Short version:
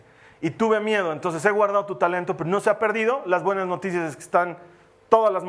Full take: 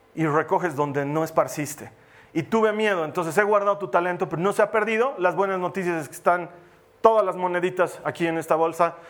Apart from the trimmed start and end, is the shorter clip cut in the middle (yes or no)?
no